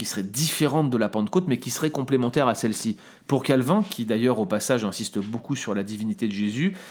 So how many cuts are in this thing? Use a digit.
0